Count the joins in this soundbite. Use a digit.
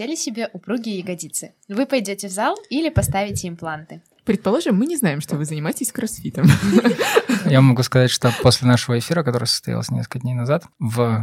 0